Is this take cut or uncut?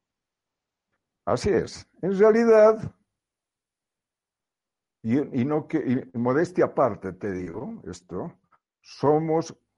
uncut